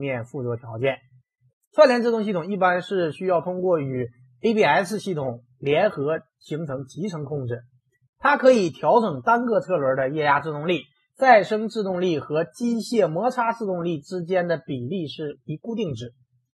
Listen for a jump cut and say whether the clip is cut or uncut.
cut